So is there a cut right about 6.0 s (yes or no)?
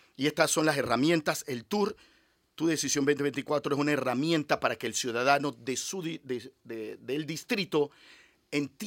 no